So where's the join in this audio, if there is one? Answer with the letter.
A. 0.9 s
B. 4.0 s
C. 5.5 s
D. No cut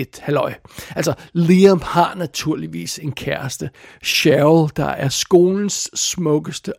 D